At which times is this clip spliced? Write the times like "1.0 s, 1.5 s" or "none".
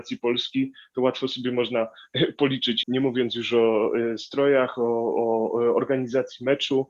2.8 s